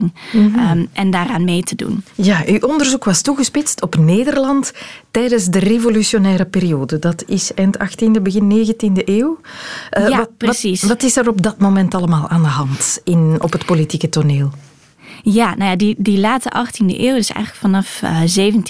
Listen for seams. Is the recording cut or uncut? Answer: uncut